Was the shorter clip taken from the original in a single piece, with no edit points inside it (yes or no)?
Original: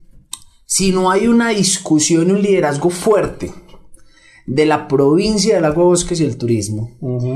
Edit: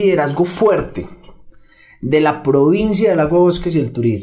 yes